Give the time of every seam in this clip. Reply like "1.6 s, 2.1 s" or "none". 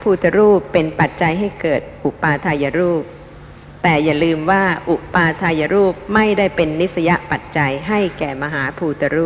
none